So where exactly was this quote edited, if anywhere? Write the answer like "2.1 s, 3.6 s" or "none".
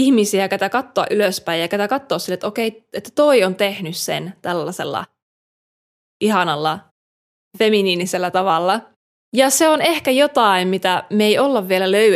9.1 s